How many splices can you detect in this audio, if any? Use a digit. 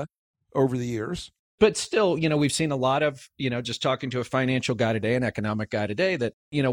1